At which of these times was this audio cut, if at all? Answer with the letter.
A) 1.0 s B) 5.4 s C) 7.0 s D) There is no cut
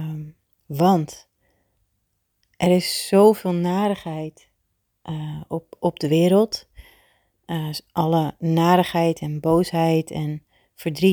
D